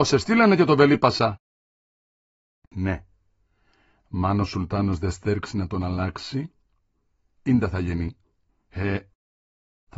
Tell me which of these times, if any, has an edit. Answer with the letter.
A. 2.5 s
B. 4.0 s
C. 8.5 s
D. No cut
C